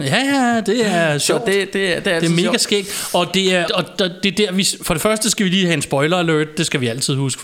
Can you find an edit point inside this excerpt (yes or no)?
yes